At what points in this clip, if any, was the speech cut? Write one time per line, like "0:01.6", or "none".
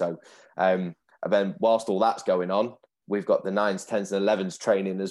none